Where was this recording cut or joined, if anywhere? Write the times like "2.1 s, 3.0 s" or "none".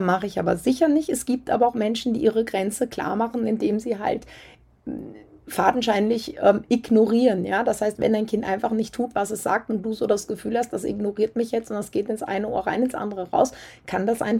none